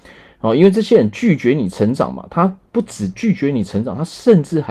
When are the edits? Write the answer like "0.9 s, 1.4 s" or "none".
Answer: none